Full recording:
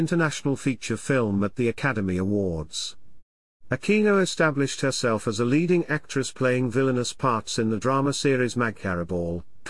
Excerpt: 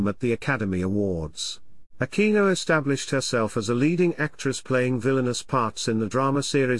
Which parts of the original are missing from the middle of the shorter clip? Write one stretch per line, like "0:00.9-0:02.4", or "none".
0:03.3-0:03.6